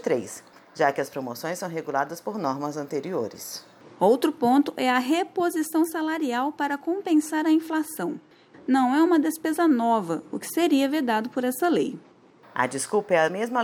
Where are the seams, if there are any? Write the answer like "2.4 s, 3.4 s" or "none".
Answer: 8.5 s, 12.5 s

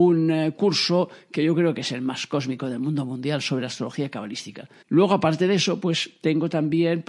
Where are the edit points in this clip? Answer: 4.8 s

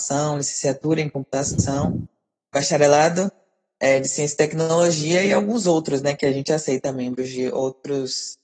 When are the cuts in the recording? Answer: none

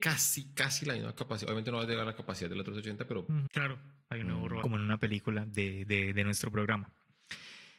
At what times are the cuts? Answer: 3.5 s, 4.6 s

